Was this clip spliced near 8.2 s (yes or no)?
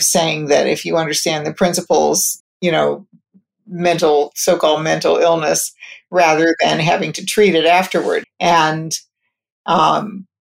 yes